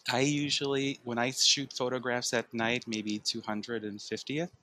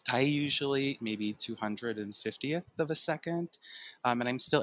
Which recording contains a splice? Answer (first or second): second